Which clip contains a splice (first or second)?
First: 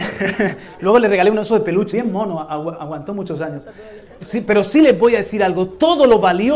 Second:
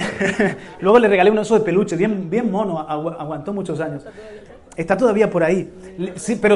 first